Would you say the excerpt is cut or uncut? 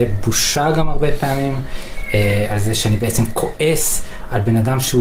uncut